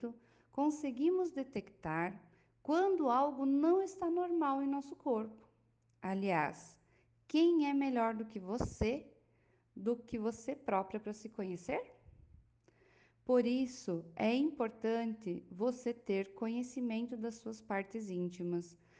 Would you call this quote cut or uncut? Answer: uncut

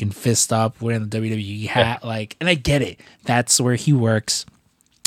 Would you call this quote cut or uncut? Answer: uncut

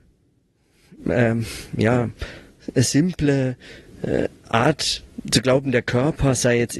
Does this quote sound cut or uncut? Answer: uncut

